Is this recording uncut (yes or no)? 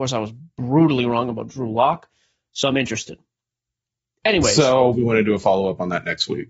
no